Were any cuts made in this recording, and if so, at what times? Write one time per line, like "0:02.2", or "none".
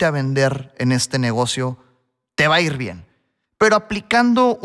0:03.4